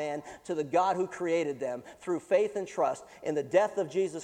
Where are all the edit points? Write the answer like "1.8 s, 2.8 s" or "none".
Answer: none